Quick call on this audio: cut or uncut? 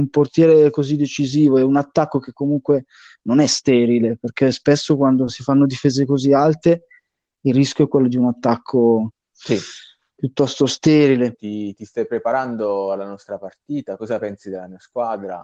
cut